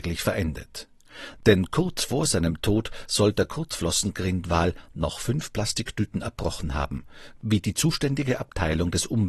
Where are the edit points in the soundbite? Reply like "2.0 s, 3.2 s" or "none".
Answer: 1.4 s